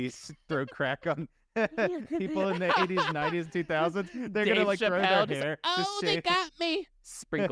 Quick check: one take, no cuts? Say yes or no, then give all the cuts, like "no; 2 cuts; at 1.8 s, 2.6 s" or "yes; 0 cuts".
yes; 0 cuts